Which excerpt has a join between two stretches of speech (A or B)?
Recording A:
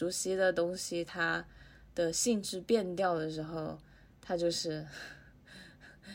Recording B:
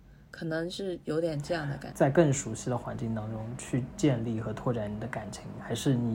B